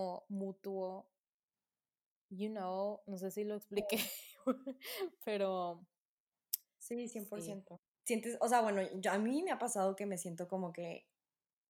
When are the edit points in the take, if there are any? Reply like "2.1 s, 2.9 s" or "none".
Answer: 7.9 s